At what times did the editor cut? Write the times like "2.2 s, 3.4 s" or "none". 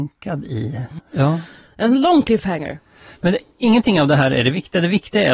1.0 s